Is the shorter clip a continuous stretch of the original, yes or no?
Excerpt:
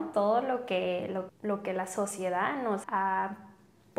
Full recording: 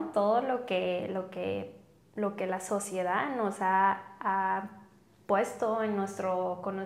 no